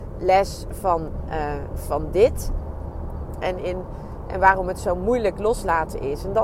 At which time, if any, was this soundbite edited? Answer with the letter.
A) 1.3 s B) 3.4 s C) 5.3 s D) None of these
B